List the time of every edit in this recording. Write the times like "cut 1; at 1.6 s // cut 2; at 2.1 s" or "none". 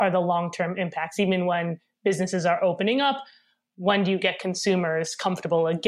none